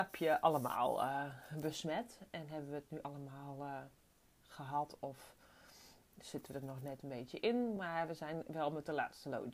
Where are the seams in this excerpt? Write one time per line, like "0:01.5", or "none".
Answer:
none